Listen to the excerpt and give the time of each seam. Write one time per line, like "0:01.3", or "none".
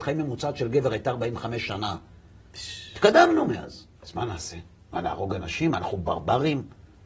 0:04.0